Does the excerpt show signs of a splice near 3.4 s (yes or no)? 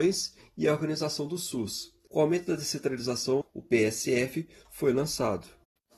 yes